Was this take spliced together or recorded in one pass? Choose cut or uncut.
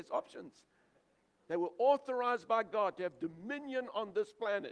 cut